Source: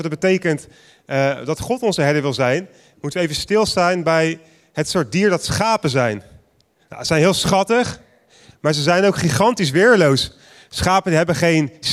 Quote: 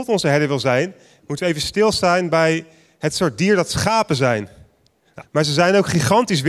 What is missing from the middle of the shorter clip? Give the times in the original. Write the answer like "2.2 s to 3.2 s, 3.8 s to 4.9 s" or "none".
6.9 s to 8.5 s